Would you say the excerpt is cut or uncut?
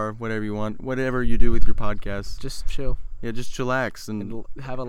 uncut